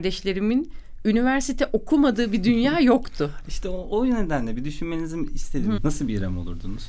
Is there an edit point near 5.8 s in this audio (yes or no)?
yes